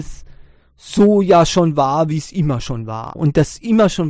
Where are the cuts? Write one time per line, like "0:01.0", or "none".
0:03.1